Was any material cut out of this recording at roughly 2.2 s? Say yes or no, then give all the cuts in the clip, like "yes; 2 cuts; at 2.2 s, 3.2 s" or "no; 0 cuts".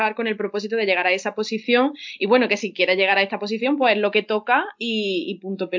no; 0 cuts